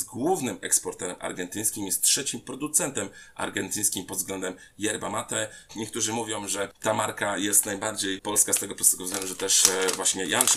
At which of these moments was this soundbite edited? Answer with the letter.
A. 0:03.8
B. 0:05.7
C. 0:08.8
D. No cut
B